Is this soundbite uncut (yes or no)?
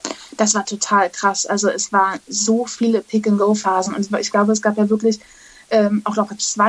yes